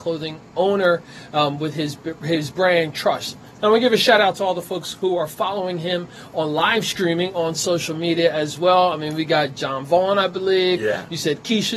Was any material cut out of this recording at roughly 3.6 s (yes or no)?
yes